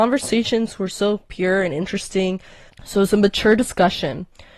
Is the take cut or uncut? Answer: cut